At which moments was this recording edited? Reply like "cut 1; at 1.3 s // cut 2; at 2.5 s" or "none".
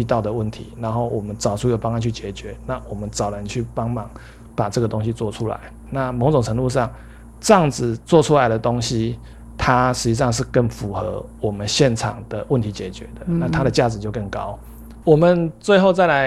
cut 1; at 5.9 s // cut 2; at 15.0 s

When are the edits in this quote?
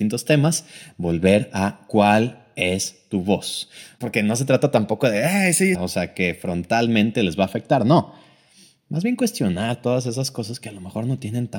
cut 1; at 4.0 s // cut 2; at 5.7 s

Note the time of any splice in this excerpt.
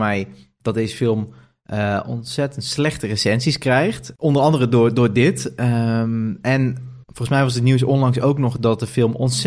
cut 1; at 7.0 s

